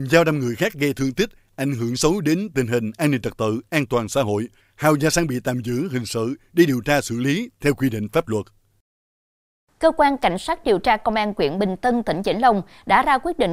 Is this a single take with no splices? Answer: yes; 0 cuts

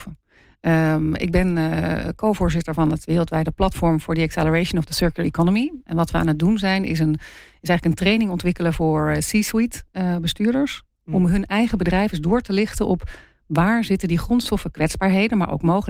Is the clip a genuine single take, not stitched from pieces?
yes; 0 cuts

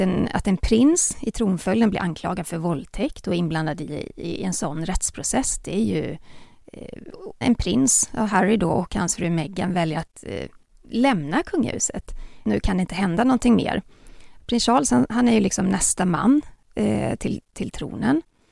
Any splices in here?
yes; 3 cuts; at 7.4 s, 12.4 s, 14.4 s

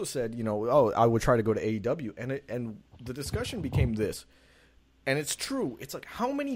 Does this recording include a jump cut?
no; 0 cuts

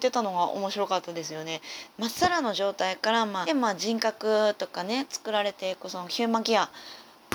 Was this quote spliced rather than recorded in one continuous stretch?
yes; 2 cuts; at 1.9 s, 3.5 s

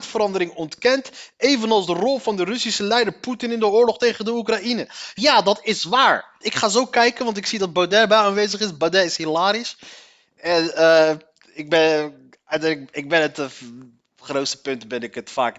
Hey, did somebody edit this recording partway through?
yes; 2 cuts; at 5.2 s, 6.4 s

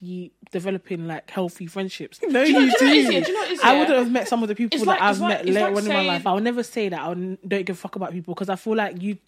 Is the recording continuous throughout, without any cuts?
no; 2 cuts; at 2.2 s, 6.2 s

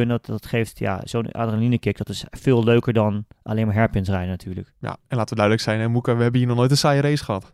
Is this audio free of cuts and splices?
yes; 0 cuts

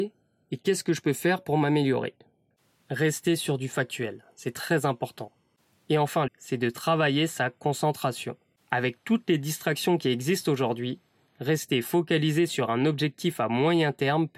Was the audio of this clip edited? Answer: yes; 1 cut; at 6.3 s

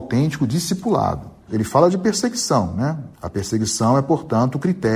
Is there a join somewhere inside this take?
yes; 2 cuts; at 1.5 s, 3.1 s

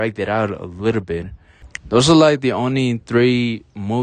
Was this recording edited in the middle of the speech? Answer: yes; 1 cut; at 1.8 s

